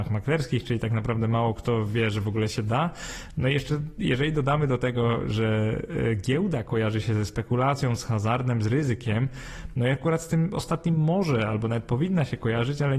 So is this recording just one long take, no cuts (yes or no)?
yes